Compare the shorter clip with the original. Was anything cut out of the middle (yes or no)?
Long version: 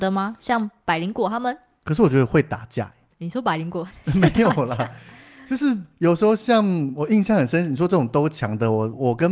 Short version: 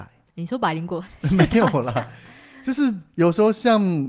no